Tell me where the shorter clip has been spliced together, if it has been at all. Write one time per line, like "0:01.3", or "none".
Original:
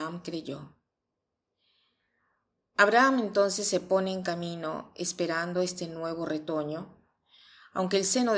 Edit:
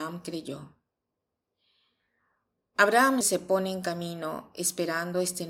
0:03.2